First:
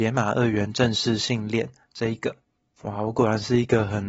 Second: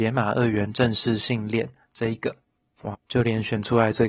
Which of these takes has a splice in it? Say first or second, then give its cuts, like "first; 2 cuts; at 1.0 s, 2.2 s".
second; 1 cut; at 2.9 s